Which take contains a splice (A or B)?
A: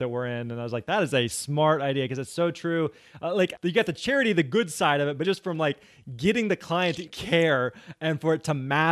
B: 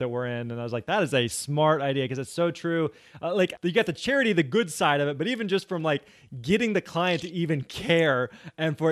A